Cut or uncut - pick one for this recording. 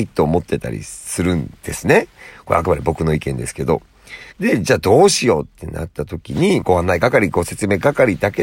cut